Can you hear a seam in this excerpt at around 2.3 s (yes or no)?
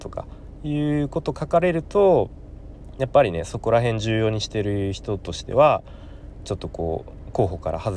no